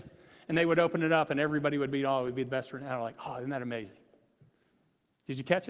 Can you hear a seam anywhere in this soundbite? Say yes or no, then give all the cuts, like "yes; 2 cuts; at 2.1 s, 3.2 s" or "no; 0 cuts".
no; 0 cuts